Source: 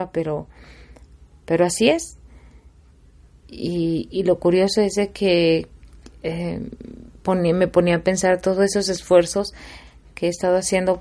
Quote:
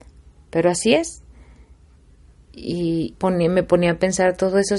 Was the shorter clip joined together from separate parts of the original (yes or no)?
yes